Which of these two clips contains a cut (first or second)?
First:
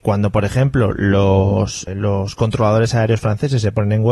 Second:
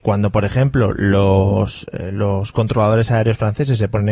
first